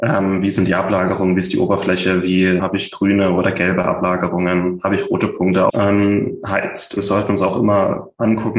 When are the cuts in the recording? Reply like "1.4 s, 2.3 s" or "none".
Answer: 2.6 s, 5.7 s, 7.0 s